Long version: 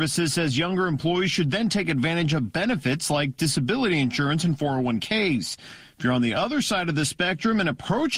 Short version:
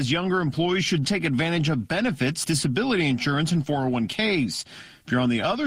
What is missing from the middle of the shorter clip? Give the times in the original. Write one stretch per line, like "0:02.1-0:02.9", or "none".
0:01.5-0:01.7
0:03.1-0:03.4